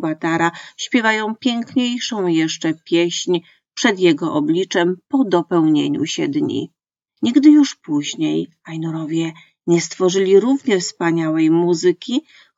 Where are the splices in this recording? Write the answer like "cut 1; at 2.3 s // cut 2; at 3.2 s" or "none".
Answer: cut 1; at 7.1 s